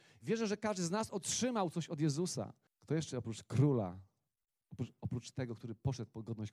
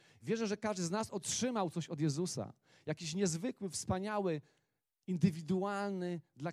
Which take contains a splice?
first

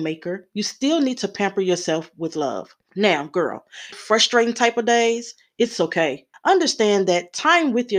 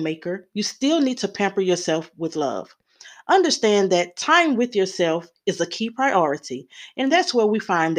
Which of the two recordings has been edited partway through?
first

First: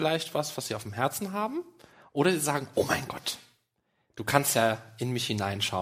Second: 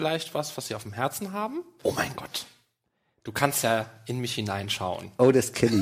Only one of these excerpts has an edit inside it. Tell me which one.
second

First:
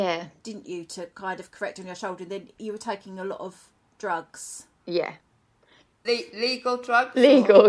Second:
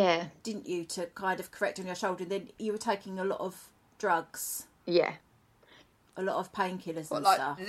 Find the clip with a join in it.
first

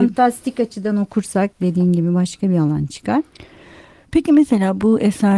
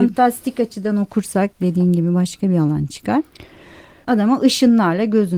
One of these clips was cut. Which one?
second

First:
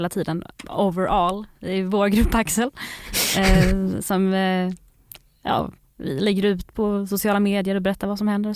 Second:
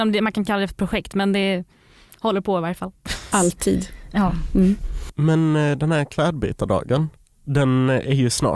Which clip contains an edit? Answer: second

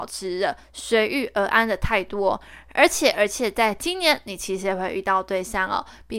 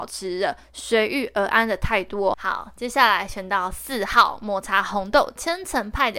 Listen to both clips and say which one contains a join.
second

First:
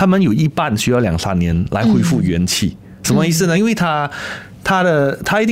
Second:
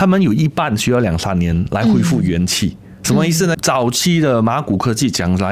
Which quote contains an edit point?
second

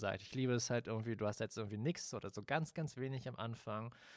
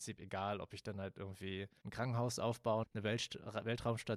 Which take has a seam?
second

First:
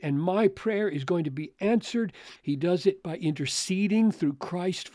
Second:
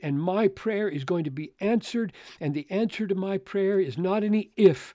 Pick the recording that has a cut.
first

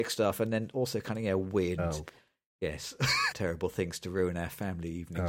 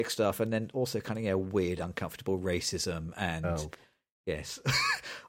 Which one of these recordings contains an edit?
first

